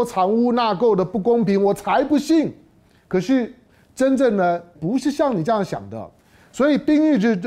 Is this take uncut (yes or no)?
no